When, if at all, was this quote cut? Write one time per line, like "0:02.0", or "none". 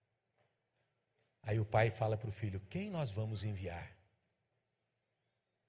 none